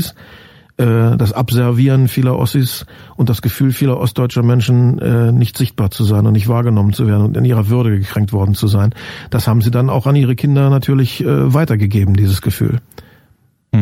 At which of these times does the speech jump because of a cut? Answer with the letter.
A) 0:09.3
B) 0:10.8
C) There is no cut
C